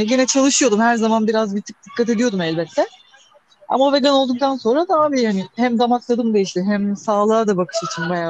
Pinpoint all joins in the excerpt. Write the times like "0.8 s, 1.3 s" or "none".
6.6 s

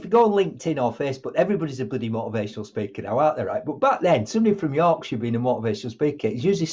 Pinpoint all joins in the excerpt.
none

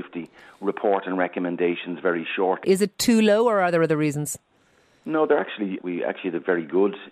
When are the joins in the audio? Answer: 2.6 s, 5.8 s

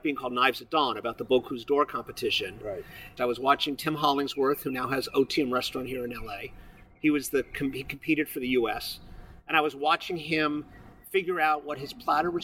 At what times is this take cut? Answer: 3.2 s

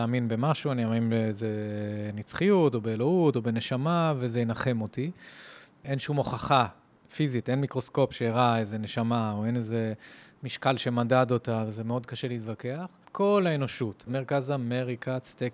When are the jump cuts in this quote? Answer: 13.0 s, 14.1 s

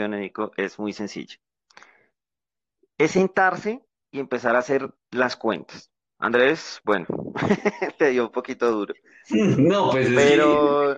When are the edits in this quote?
6.0 s

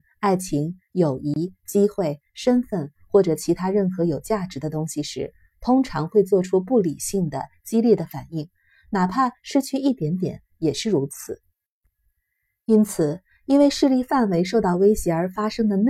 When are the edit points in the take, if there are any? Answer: 1.6 s

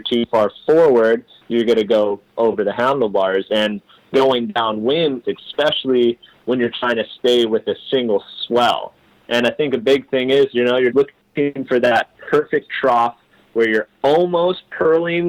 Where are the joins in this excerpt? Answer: 5.2 s, 10.9 s

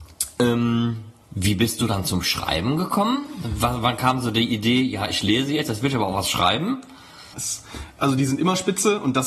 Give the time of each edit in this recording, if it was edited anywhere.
7.3 s

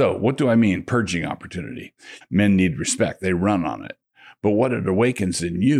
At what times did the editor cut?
2.2 s

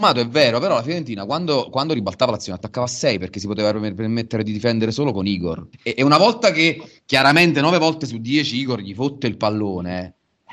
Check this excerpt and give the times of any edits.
5.7 s

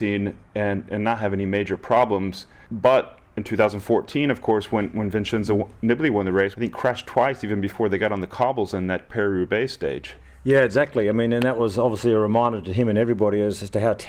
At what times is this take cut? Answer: 6.5 s

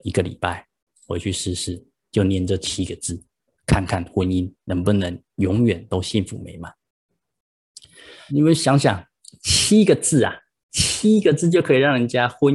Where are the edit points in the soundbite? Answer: 8.3 s

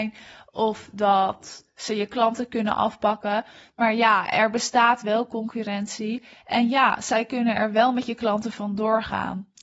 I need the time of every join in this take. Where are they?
none

